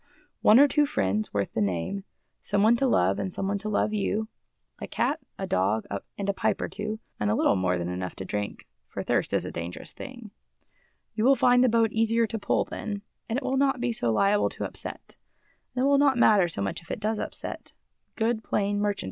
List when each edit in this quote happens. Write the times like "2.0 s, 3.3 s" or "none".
7.1 s